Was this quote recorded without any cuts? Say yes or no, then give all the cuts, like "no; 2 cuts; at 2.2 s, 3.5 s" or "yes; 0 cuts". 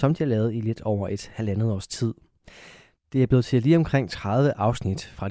yes; 0 cuts